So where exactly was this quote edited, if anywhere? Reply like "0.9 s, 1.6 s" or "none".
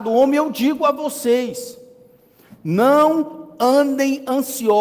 none